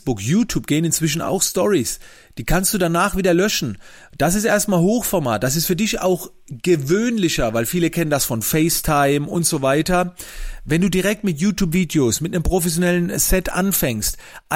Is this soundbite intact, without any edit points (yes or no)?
yes